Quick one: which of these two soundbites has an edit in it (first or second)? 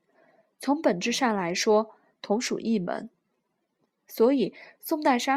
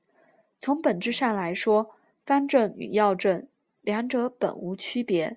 first